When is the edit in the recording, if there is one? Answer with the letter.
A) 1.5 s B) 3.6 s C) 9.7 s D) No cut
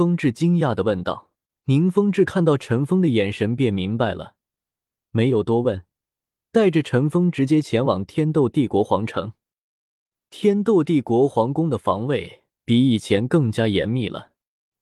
A